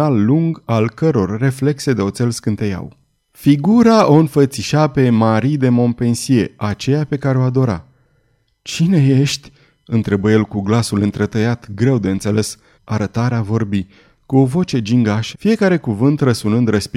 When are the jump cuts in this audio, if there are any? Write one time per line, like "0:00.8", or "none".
0:12.7
0:15.3

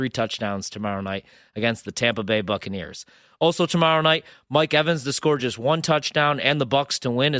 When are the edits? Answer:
none

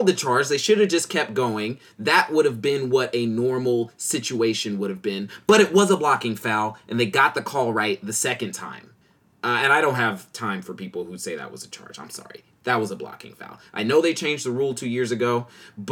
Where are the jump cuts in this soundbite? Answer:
none

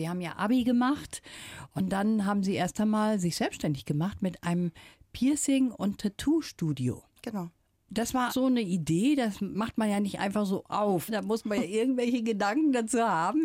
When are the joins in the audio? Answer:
0:08.3

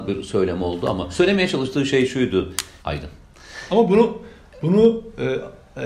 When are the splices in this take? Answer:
0:02.8

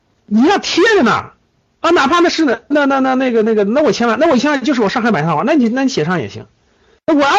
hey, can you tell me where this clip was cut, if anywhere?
0:02.7

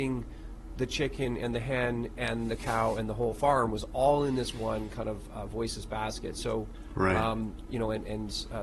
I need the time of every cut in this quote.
0:07.7

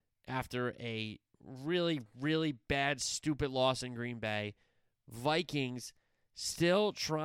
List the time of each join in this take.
none

